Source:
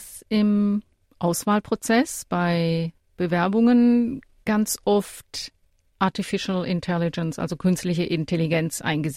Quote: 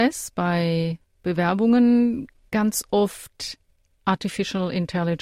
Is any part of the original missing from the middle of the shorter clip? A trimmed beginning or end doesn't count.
no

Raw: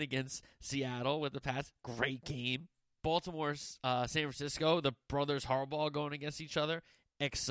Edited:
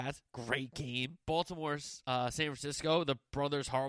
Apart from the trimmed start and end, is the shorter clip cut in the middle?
yes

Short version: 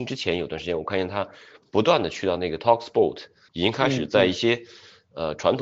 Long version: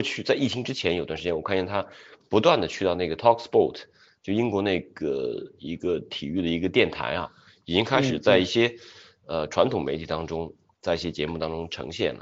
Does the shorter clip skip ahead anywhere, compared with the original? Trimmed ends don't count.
yes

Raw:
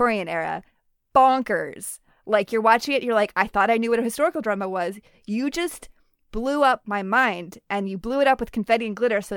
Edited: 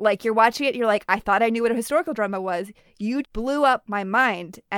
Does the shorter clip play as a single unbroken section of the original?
no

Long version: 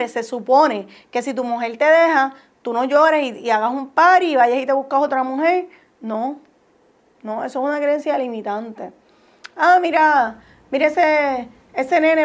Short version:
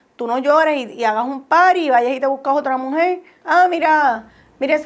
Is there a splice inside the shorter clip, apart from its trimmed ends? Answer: yes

